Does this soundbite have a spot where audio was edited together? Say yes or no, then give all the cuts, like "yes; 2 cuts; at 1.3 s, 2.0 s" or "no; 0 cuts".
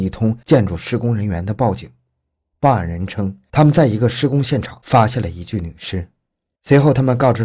yes; 1 cut; at 6.6 s